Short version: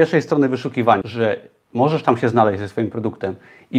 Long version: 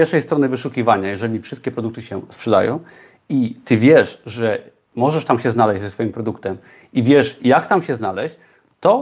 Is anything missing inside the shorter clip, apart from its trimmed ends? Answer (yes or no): yes